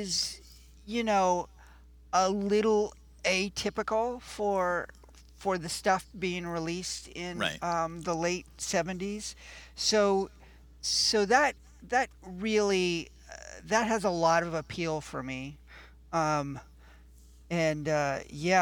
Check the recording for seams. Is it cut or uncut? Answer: uncut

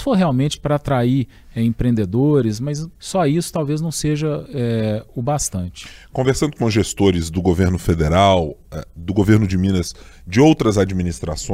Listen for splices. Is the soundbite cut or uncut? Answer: cut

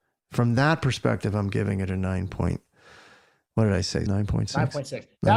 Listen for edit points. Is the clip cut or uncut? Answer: cut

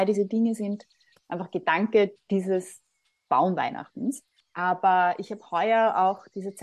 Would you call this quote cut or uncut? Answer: cut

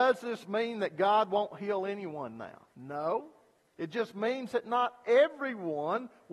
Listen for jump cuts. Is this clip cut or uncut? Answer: uncut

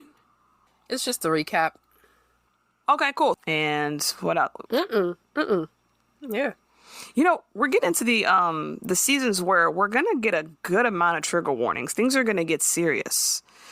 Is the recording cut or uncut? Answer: cut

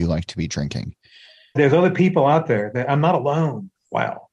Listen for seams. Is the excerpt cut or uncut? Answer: cut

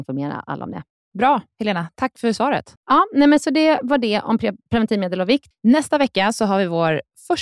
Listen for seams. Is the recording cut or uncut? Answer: cut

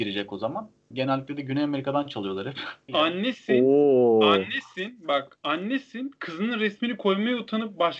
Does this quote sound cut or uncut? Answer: cut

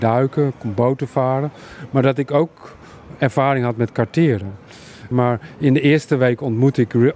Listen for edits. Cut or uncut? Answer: cut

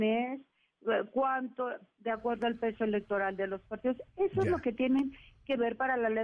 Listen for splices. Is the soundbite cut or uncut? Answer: uncut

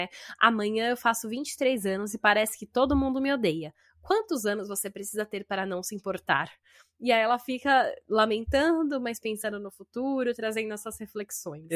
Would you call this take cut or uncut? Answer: uncut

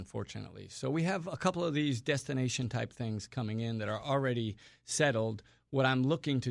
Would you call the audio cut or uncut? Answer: uncut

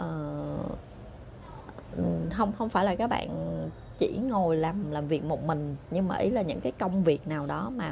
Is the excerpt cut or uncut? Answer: uncut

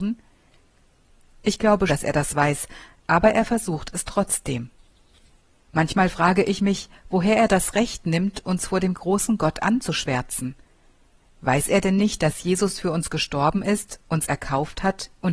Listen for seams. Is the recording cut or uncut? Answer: cut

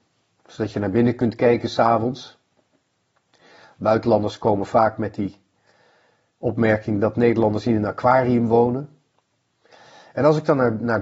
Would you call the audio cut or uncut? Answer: uncut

